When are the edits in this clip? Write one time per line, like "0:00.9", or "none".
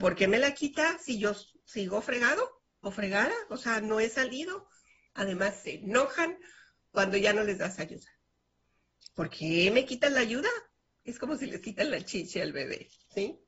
0:05.1